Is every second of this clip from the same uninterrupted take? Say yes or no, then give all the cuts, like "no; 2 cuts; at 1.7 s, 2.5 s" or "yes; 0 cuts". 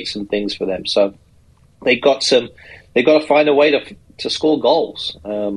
yes; 0 cuts